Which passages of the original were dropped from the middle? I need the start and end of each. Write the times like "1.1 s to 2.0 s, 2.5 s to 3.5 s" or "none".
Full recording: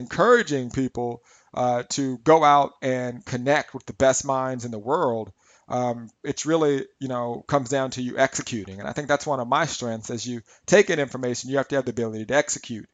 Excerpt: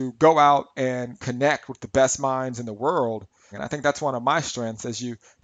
5.6 s to 8.8 s